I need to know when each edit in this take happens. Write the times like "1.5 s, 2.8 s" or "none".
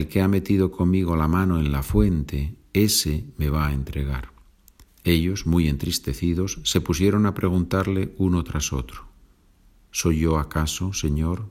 4.9 s